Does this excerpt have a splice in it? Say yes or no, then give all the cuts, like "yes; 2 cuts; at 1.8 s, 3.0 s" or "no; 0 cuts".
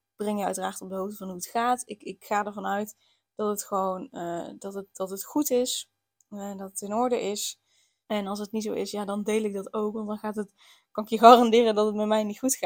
yes; 1 cut; at 8.1 s